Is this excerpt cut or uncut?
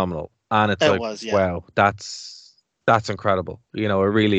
uncut